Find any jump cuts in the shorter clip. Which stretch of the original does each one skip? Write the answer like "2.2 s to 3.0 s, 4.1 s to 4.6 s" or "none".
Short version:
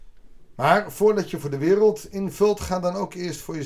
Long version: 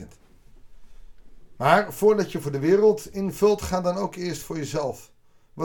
none